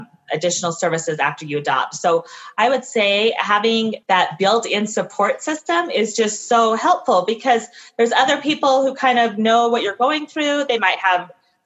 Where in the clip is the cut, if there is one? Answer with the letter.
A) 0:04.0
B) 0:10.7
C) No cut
A